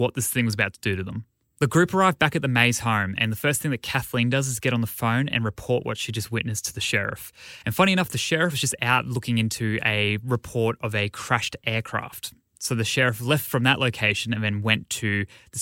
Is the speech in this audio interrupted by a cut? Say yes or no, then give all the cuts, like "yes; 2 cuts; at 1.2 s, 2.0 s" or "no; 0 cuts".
no; 0 cuts